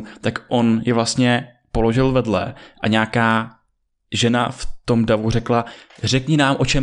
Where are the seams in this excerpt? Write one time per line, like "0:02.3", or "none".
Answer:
none